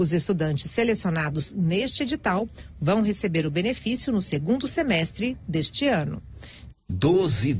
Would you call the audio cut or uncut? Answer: cut